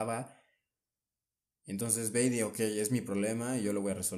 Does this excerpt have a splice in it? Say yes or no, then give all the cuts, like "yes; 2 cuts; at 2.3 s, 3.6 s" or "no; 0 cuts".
yes; 1 cut; at 1.6 s